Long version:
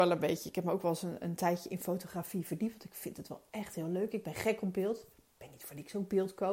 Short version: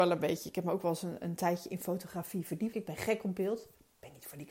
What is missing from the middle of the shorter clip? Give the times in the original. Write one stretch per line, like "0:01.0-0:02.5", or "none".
0:02.7-0:04.1